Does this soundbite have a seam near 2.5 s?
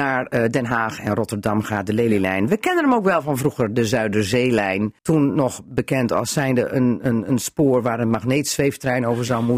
no; 1 cut; at 5.0 s

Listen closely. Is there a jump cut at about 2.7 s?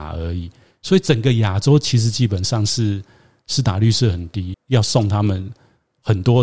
no; 1 cut; at 4.5 s

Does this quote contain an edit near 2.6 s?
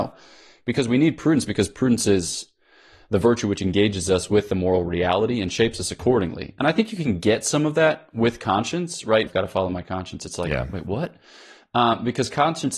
no; 1 cut; at 9.3 s

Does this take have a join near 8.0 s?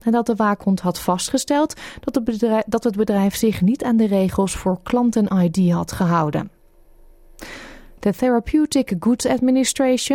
yes; 1 cut; at 8.0 s

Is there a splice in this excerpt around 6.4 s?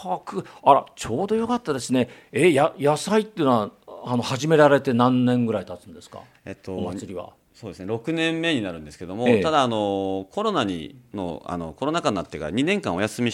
no; 0 cuts

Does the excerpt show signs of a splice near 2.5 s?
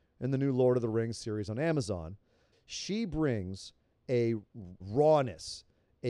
yes; 2 cuts; at 2.5 s, 4.8 s

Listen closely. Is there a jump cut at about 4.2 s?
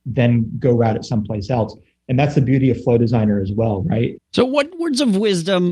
yes; 1 cut; at 4.2 s

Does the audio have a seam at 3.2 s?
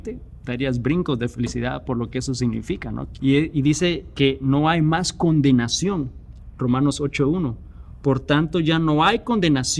yes; 1 cut; at 3.2 s

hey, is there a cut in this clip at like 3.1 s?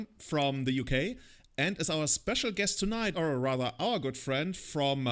yes; 1 cut; at 3.1 s

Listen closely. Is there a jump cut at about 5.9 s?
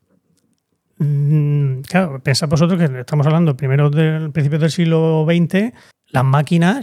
yes; 1 cut; at 5.9 s

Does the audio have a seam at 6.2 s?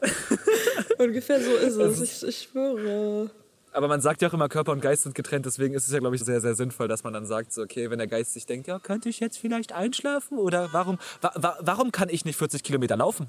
yes; 1 cut; at 6.2 s

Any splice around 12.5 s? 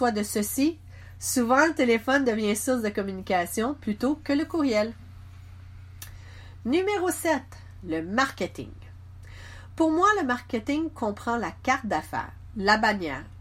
yes; 1 cut; at 12.5 s

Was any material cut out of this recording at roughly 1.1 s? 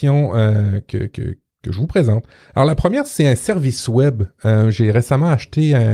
no; 0 cuts

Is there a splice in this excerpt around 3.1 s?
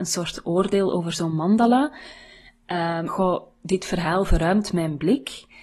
yes; 1 cut; at 3.1 s

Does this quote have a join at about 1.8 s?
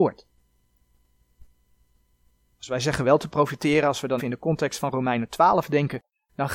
no; 1 cut; at 4.2 s

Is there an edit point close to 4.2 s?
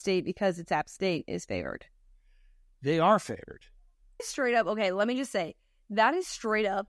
yes; 1 cut; at 4.2 s

